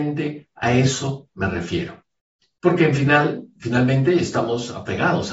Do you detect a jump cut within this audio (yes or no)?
no